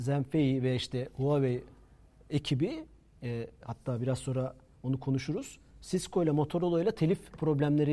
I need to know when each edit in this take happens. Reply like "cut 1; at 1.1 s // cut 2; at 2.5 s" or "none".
none